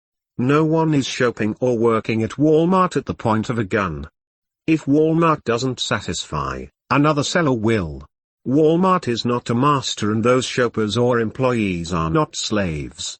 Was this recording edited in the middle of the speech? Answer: no; 0 cuts

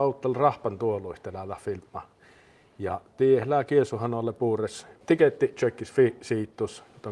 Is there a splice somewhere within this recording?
yes; 1 cut; at 5.0 s

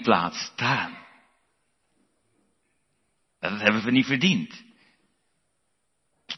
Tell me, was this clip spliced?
no; 0 cuts

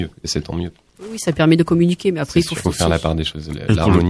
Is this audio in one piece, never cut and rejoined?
no; 1 cut; at 2.6 s

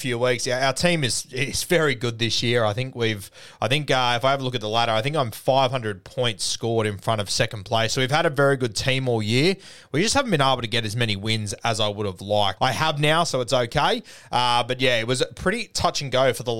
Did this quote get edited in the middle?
yes; 1 cut; at 12.6 s

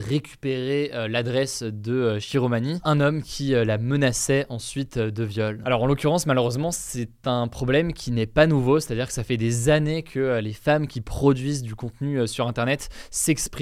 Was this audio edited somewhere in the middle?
no; 0 cuts

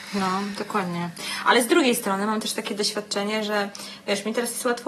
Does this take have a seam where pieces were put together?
no; 0 cuts

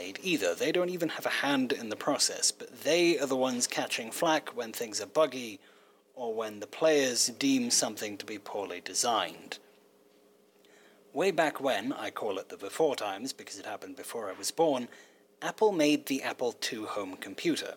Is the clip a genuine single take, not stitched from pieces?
yes; 0 cuts

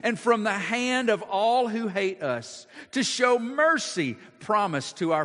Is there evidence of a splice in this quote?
no; 0 cuts

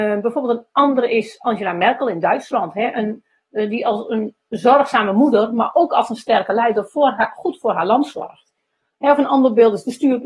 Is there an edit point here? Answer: no; 0 cuts

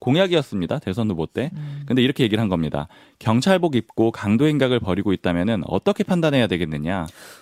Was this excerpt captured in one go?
yes; 0 cuts

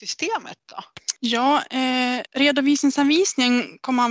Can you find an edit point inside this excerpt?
yes; 2 cuts; at 1.2 s, 2.3 s

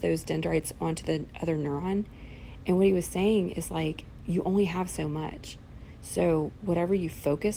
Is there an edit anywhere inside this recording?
no; 0 cuts

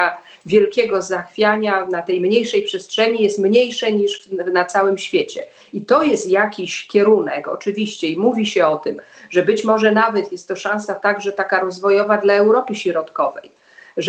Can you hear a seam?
no; 0 cuts

